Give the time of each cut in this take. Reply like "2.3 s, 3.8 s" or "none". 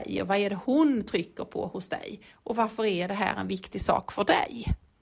none